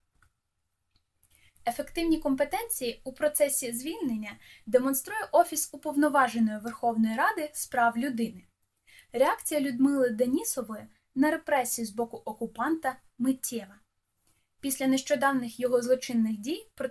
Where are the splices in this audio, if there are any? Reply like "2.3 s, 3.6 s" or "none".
none